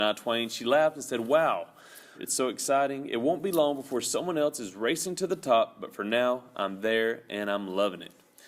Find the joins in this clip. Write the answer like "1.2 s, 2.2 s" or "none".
2.1 s